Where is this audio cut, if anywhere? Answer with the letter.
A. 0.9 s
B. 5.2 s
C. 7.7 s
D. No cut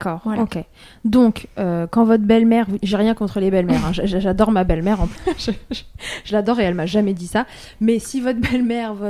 B